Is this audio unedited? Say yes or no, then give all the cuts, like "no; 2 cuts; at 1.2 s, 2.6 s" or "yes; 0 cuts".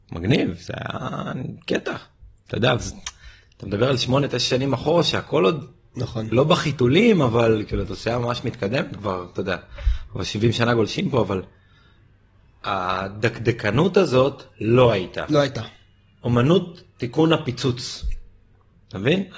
yes; 0 cuts